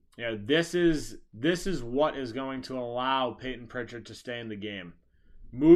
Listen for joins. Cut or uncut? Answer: uncut